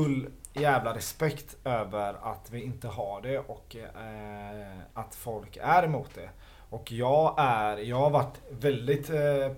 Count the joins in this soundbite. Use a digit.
0